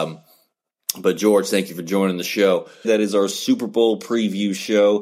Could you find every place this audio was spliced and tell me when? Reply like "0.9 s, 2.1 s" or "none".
2.8 s